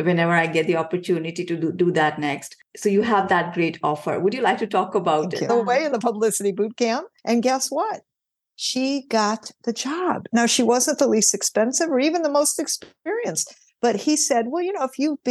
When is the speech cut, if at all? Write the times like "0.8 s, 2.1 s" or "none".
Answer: 5.5 s